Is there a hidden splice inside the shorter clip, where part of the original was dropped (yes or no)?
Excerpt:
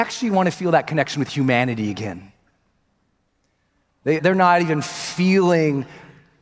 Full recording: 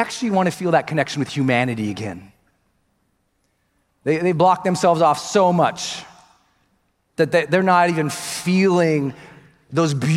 yes